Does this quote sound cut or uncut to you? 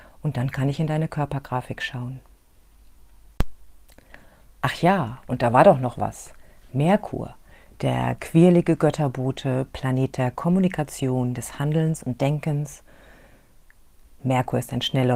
uncut